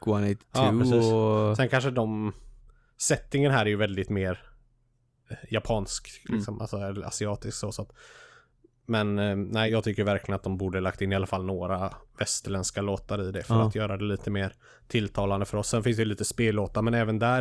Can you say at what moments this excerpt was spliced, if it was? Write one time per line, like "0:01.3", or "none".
0:09.7